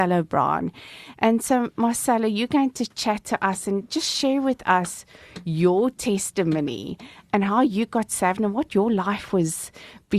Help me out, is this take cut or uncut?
uncut